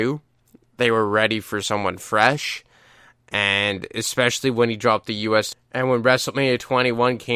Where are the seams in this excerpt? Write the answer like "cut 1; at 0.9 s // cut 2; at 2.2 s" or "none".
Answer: cut 1; at 5.5 s